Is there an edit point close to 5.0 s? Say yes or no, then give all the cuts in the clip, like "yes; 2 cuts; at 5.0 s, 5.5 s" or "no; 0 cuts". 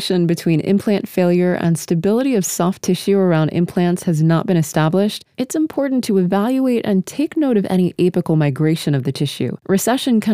no; 0 cuts